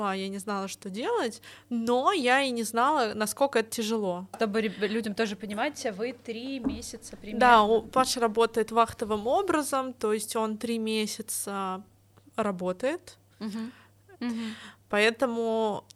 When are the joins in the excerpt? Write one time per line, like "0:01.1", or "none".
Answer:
0:04.3
0:14.2